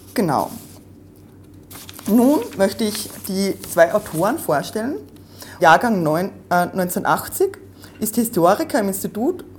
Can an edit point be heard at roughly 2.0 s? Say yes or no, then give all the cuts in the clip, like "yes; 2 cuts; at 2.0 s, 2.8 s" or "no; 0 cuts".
no; 1 cut; at 5.6 s